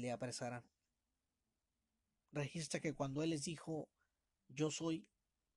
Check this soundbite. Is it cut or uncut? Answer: cut